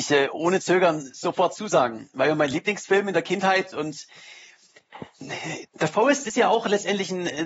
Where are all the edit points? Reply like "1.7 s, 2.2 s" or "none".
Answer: none